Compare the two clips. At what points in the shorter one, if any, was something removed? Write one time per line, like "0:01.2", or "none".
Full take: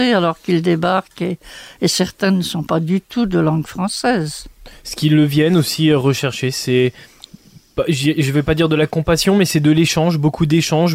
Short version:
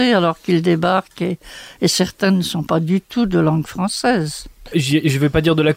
0:04.7